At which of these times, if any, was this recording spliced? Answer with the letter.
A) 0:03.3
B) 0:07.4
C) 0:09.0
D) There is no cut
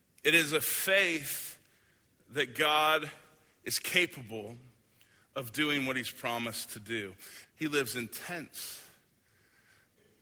B